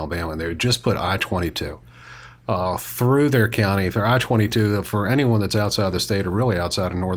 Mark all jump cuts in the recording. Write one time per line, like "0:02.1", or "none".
none